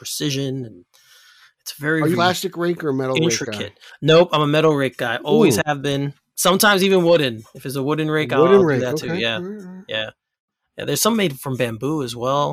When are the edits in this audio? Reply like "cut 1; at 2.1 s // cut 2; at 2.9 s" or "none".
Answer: cut 1; at 2.1 s